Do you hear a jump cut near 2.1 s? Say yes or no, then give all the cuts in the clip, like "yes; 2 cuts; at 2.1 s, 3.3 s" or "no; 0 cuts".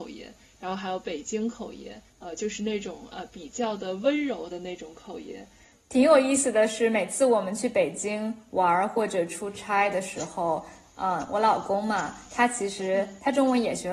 yes; 1 cut; at 2.1 s